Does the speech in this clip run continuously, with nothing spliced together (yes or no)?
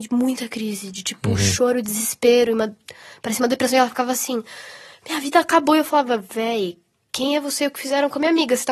yes